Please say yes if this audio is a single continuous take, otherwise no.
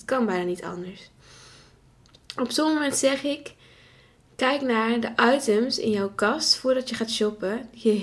yes